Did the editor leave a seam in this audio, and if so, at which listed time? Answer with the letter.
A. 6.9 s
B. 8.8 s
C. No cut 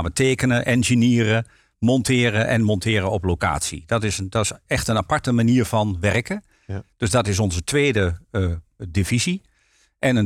B